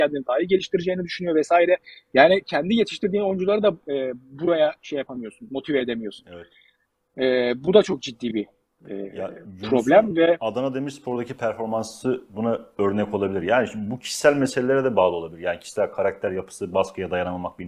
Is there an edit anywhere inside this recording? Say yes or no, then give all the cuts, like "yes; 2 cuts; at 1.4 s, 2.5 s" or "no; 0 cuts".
no; 0 cuts